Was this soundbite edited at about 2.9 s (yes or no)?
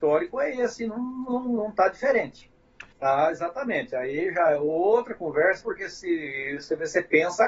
yes